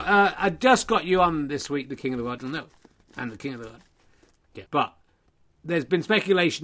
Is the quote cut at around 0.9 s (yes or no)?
no